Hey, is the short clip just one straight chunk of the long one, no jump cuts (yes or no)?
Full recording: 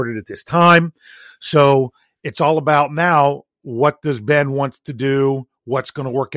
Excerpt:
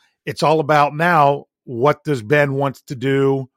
yes